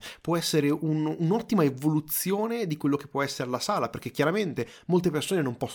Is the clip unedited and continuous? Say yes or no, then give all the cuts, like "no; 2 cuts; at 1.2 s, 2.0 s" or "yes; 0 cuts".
yes; 0 cuts